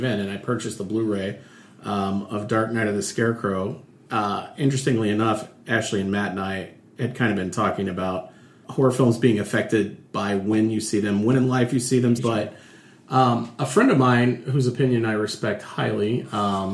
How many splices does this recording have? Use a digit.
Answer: 2